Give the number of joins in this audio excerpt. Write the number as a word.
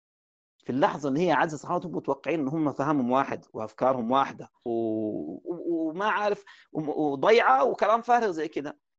one